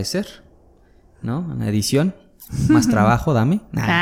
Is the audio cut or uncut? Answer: uncut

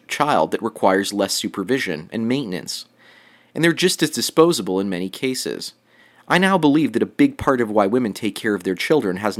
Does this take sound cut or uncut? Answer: uncut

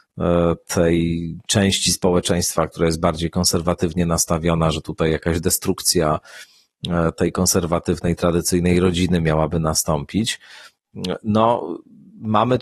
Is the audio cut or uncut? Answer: uncut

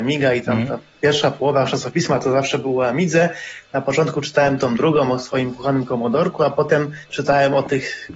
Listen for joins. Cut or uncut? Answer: uncut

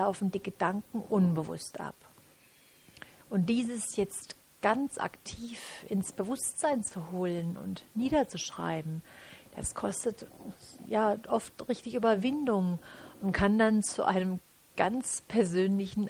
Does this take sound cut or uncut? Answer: uncut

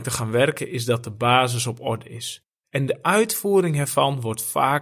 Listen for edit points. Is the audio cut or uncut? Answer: cut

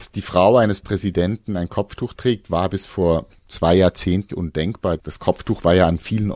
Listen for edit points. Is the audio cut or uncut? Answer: cut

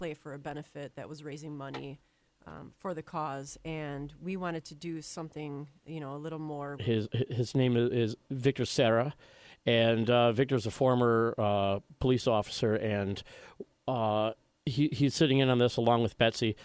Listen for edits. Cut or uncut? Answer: cut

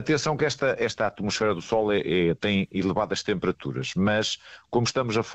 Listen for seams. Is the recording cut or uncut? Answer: uncut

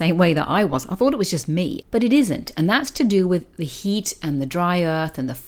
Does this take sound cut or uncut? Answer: cut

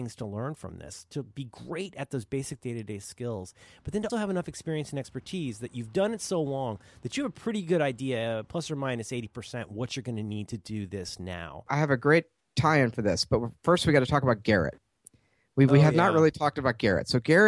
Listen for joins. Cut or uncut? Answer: cut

